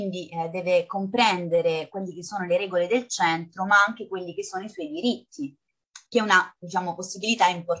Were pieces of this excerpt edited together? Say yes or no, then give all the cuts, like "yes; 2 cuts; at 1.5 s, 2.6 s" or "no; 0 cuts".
yes; 1 cut; at 6.1 s